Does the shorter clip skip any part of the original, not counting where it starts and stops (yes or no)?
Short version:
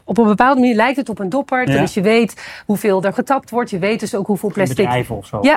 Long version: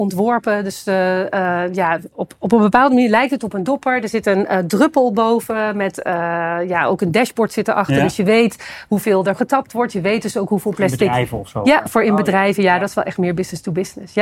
yes